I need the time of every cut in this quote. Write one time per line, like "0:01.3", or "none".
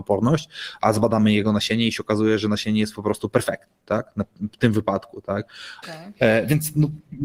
0:05.8

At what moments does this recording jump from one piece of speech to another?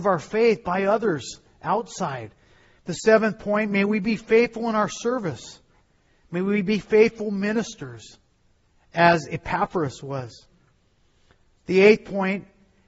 0:02.8

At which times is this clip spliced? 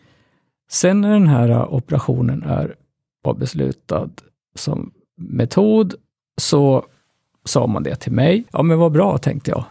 0:08.5

